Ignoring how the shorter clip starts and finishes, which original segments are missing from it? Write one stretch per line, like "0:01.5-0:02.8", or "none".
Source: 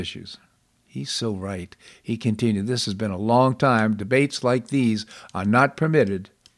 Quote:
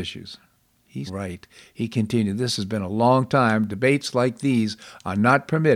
0:01.1-0:01.3